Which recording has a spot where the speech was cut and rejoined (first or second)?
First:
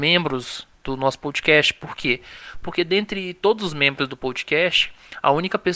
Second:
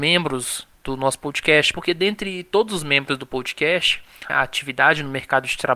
second